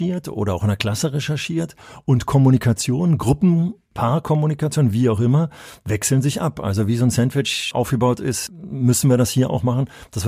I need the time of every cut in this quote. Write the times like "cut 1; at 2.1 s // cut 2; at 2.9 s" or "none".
cut 1; at 7.7 s